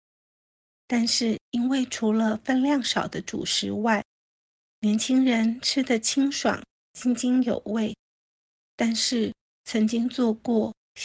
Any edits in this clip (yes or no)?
yes